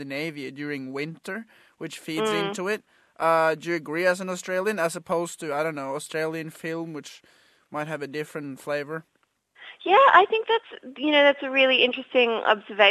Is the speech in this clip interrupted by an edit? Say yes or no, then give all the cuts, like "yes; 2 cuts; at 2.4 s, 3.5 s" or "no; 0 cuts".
no; 0 cuts